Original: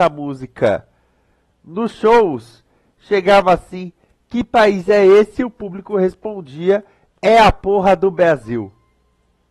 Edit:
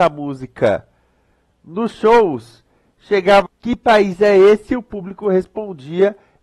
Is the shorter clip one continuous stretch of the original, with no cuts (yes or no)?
no